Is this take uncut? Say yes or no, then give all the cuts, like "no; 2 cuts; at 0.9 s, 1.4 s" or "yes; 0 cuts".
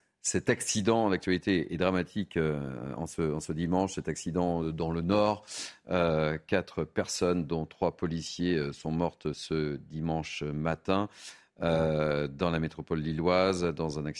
yes; 0 cuts